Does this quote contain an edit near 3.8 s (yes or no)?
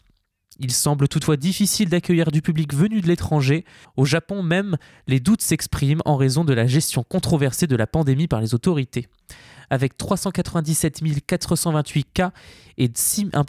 yes